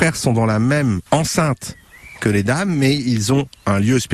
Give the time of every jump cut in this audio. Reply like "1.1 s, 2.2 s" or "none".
1.1 s